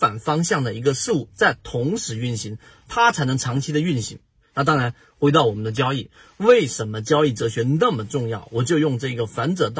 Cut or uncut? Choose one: cut